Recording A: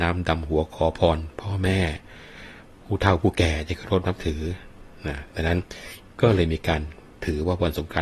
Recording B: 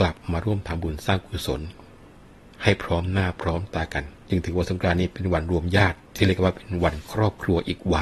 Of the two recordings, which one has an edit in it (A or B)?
B